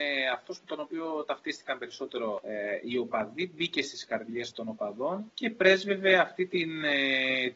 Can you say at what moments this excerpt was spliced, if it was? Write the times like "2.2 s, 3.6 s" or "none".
4.5 s